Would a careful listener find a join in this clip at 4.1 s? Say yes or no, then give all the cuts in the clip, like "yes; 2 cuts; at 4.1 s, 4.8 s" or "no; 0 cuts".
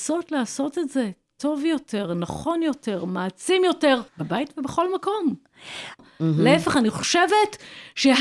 yes; 2 cuts; at 4.1 s, 6.0 s